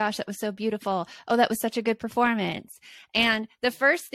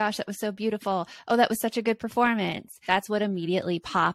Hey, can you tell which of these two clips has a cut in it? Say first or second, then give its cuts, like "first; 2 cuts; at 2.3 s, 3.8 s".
second; 1 cut; at 2.9 s